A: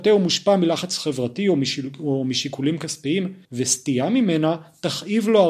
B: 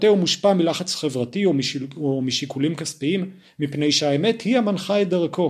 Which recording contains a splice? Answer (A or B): A